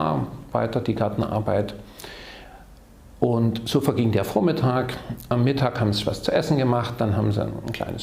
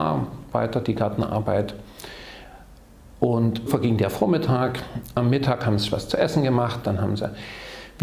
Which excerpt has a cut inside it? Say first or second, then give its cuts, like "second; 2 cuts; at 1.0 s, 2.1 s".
second; 2 cuts; at 3.7 s, 6.8 s